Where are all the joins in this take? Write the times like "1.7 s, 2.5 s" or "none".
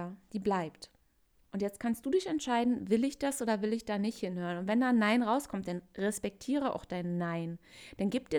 none